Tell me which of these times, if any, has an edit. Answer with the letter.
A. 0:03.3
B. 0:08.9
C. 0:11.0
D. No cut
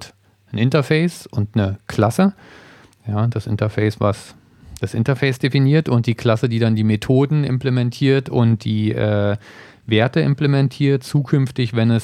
D